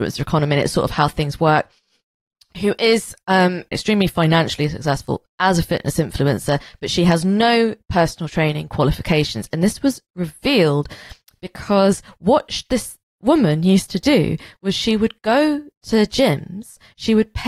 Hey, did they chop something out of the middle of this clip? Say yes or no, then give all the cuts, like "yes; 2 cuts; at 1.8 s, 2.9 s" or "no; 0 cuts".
yes; 2 cuts; at 3.7 s, 5.3 s